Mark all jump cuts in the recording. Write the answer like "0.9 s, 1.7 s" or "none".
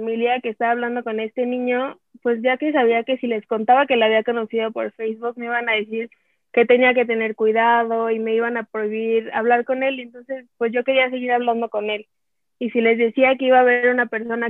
none